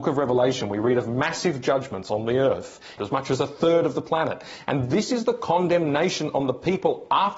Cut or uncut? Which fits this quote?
cut